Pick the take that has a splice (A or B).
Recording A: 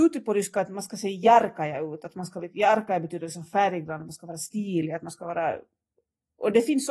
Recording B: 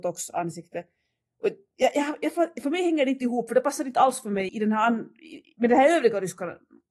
B